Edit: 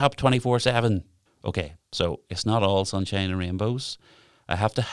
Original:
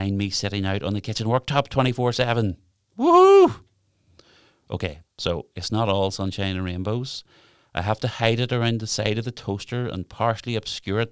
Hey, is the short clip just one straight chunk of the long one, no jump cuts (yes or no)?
no